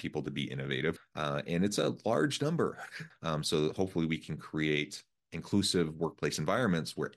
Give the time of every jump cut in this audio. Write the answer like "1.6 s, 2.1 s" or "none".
1.0 s, 3.1 s